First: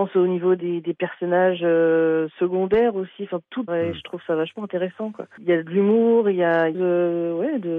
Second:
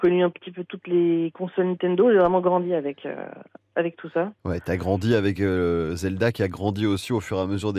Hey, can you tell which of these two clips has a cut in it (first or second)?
first